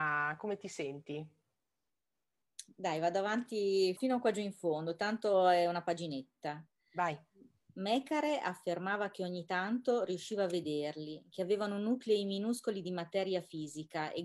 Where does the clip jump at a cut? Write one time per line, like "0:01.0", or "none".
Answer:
0:04.0